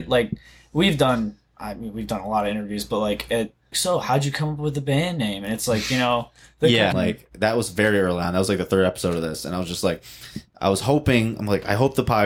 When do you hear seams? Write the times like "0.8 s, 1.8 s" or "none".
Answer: 3.7 s, 6.9 s